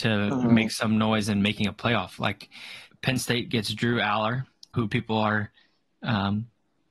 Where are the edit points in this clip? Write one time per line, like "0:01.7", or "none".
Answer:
0:02.9
0:04.7